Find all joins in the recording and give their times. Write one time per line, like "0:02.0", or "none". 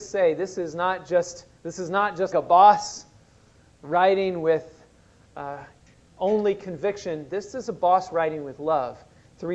0:02.3